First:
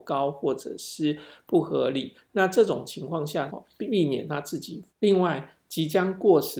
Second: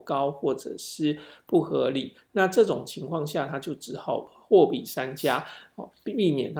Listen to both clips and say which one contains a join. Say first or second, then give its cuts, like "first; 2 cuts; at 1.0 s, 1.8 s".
first; 2 cuts; at 3.5 s, 4.9 s